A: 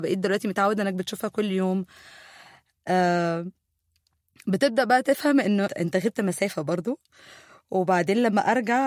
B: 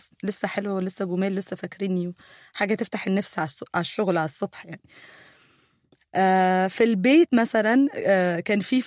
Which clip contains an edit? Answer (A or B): A